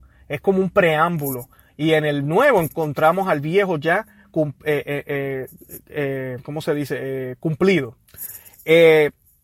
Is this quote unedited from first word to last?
yes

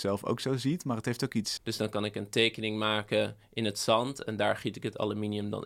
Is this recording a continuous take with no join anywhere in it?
no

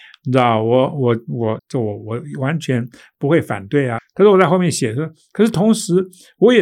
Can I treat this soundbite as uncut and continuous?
no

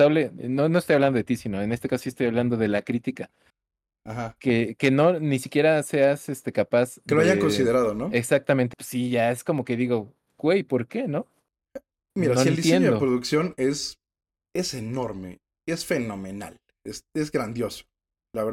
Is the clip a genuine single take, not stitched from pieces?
no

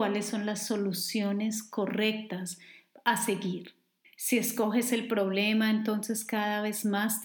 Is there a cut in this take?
yes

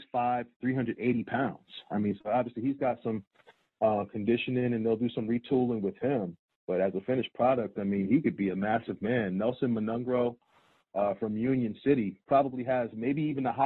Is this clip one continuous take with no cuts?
yes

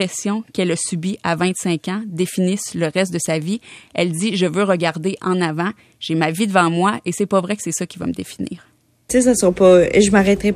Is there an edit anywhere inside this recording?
no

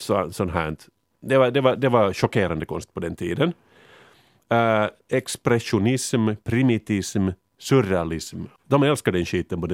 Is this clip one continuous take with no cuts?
no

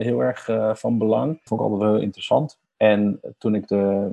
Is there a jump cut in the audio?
yes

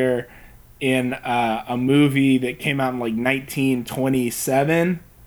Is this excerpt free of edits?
yes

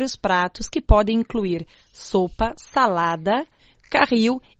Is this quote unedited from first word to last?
yes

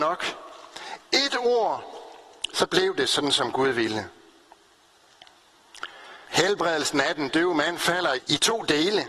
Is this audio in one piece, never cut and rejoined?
no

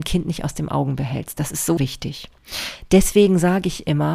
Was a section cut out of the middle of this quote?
yes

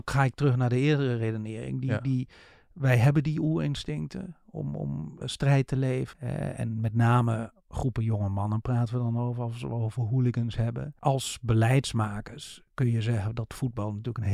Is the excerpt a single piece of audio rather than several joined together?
no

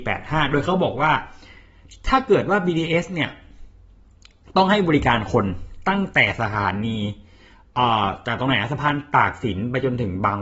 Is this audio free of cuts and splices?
yes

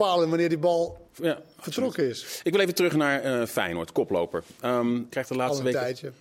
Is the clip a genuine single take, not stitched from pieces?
no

